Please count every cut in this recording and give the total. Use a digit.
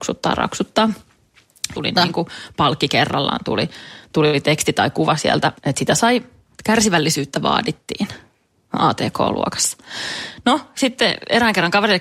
1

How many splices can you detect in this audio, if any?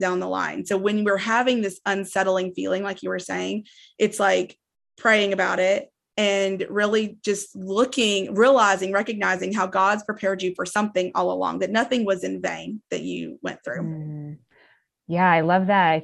0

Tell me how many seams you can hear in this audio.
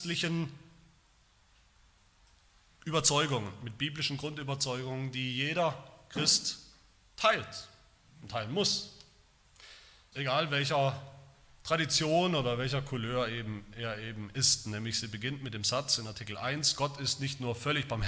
1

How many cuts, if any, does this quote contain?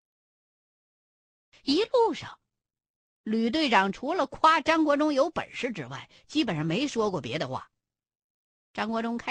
0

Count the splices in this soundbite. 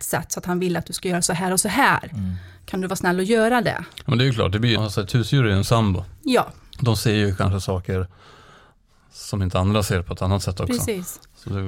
1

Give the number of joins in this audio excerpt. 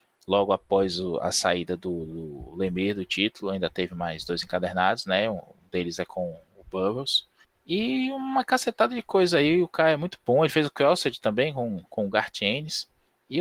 0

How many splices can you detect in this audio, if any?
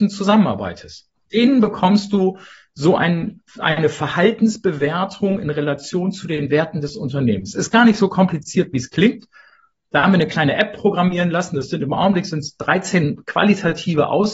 1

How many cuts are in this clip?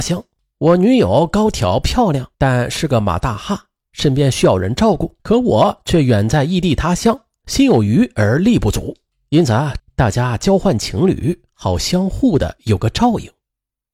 3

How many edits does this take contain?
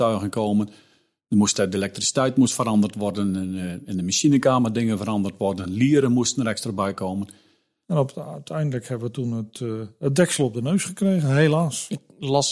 1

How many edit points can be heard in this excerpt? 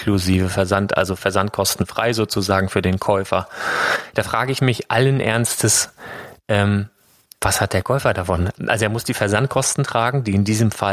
0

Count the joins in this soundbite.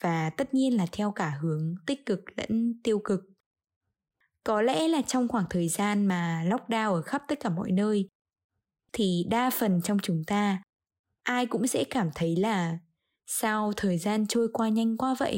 0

